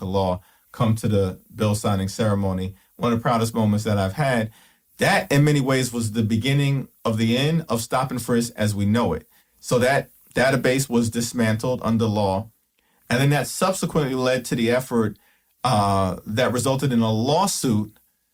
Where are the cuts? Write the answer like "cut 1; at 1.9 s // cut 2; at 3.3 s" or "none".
none